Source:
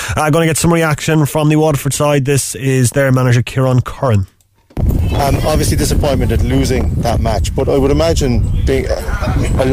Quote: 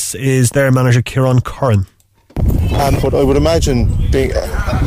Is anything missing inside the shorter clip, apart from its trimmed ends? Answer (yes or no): yes